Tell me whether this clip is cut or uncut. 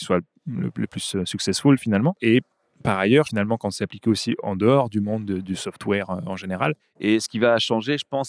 cut